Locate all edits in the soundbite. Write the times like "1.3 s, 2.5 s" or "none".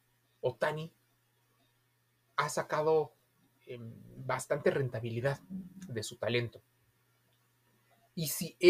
none